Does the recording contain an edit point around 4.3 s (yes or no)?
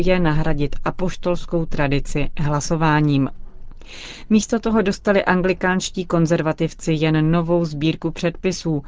no